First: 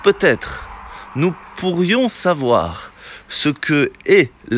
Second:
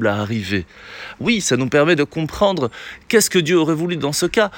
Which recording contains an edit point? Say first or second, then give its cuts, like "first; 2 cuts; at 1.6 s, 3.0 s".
second; 1 cut; at 1.1 s